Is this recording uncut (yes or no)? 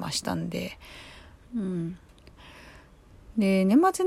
no